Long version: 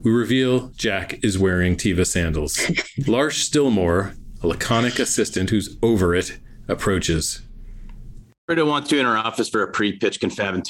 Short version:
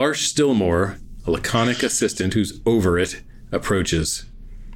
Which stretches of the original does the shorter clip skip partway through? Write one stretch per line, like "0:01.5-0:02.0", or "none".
none